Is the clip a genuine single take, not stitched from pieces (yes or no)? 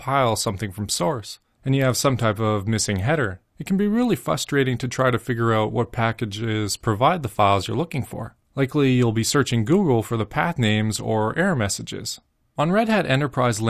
no